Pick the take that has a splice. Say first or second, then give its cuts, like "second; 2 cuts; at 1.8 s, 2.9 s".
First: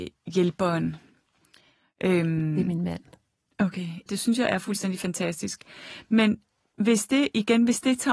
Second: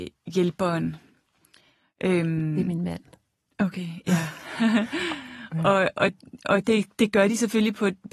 first; 1 cut; at 4.1 s